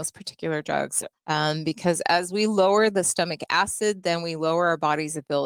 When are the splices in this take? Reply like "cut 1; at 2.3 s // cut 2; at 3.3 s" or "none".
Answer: cut 1; at 1.1 s

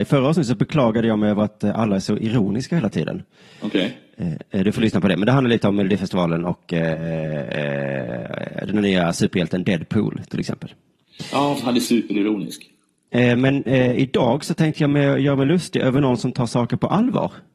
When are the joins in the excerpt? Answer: cut 1; at 13.1 s

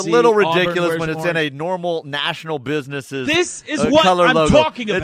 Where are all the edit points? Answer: none

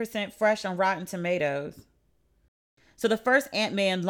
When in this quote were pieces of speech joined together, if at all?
none

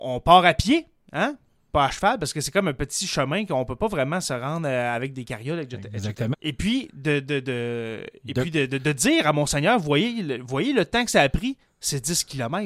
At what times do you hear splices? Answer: cut 1; at 6.3 s

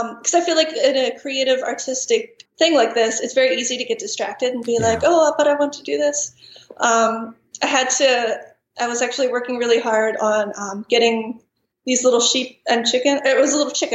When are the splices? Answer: cut 1; at 2.5 s

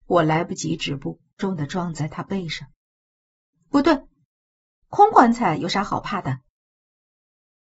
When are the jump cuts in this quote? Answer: cut 1; at 1.4 s

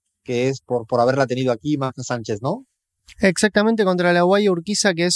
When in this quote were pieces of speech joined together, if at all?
none

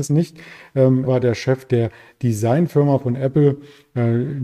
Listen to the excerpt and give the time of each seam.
cut 1; at 1.1 s

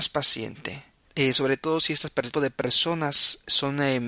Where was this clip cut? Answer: cut 1; at 1.1 s // cut 2; at 2.3 s

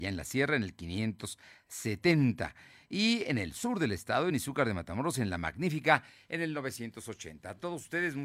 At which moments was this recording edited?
none

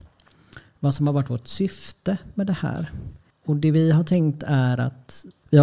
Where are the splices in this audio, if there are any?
none

